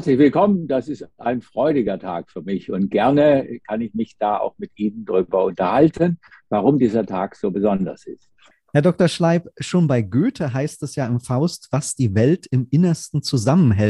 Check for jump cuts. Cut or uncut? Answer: uncut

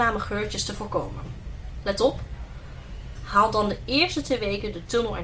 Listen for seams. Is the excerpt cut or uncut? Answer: cut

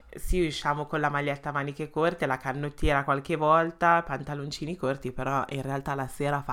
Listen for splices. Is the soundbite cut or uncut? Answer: uncut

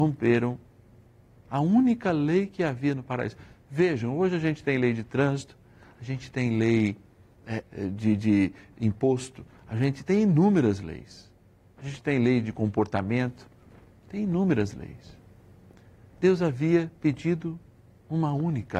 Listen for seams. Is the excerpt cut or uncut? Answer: cut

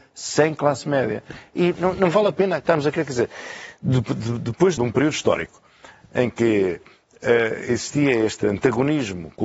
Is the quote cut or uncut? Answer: cut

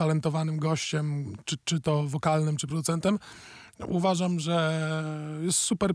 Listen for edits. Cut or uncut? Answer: uncut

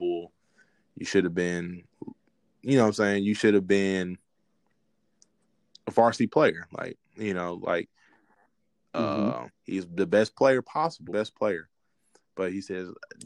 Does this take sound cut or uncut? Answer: cut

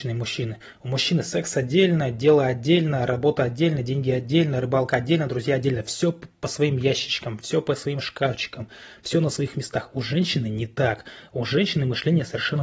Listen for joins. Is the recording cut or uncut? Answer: uncut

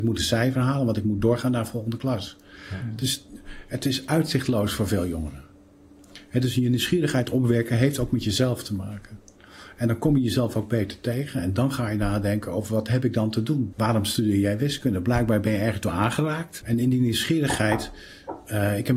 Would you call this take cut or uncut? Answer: cut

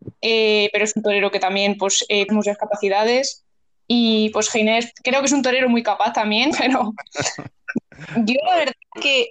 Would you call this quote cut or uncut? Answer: cut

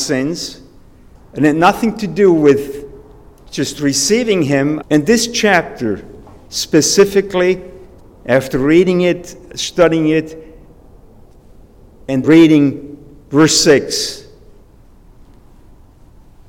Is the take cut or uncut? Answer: cut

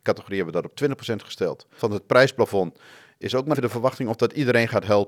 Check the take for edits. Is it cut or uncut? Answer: cut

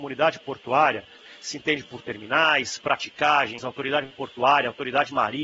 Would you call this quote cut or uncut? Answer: cut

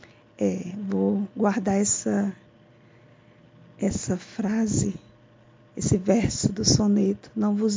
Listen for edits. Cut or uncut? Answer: uncut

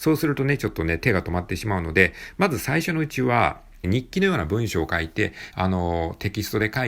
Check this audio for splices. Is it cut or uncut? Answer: cut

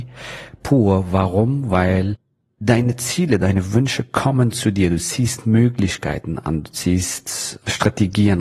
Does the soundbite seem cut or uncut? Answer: uncut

